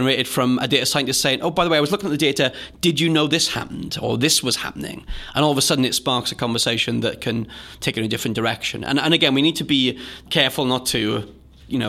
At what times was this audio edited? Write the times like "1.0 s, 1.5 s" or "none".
none